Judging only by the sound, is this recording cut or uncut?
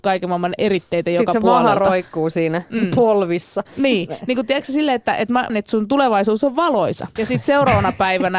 cut